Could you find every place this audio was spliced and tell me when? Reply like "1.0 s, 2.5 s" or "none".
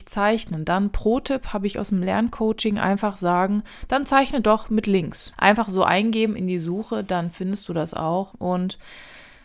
5.3 s, 8.3 s